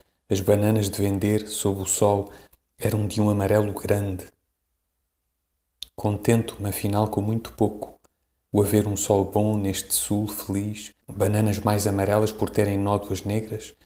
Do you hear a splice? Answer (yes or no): yes